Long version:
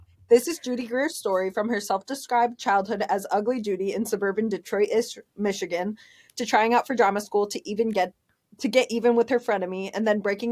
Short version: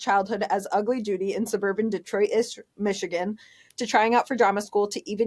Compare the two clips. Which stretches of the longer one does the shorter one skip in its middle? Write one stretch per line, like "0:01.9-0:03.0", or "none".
none